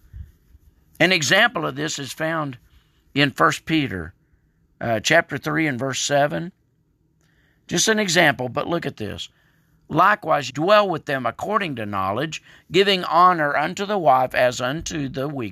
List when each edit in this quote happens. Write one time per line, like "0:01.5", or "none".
0:10.5